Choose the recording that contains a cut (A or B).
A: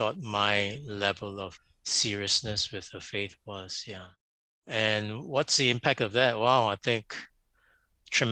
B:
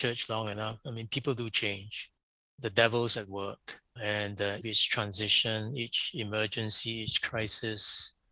B